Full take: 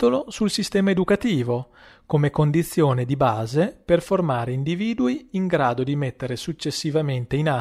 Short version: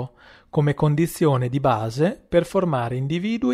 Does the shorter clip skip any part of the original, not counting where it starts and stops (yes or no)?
no